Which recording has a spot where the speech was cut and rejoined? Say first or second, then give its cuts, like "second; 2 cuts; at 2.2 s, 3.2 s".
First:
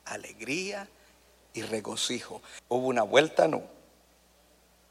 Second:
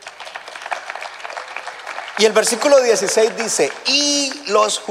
first; 1 cut; at 2.6 s